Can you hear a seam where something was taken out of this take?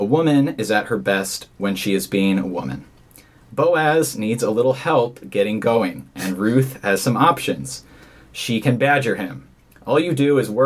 no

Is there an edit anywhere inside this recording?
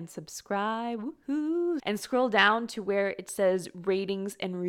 yes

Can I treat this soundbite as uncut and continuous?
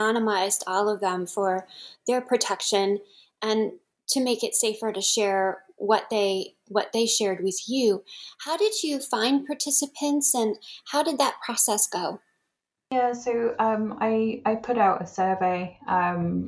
yes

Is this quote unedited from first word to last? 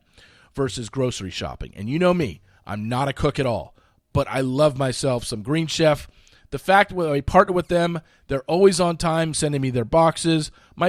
yes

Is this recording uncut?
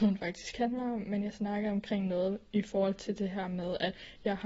yes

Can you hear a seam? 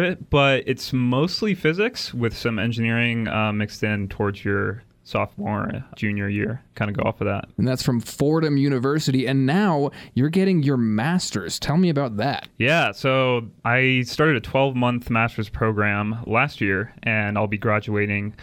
no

